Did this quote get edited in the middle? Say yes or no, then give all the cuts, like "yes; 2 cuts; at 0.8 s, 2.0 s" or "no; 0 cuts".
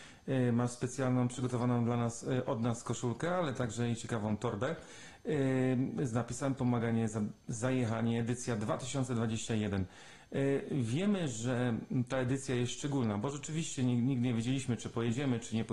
no; 0 cuts